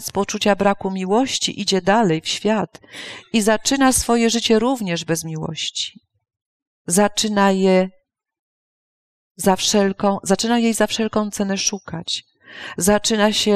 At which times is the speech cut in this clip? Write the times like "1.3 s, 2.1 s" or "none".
none